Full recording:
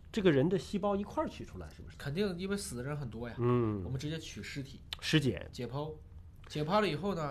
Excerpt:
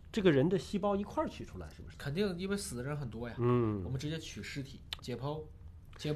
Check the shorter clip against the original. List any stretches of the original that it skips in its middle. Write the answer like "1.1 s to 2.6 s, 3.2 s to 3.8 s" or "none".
5.0 s to 5.5 s